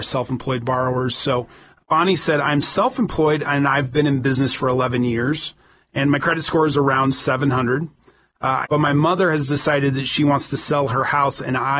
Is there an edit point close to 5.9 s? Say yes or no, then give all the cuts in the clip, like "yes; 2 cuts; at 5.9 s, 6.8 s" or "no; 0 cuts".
no; 2 cuts; at 1.8 s, 8.6 s